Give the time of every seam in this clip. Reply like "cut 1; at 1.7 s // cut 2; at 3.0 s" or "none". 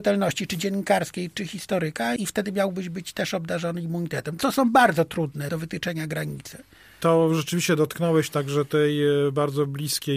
none